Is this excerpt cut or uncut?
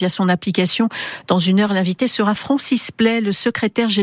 uncut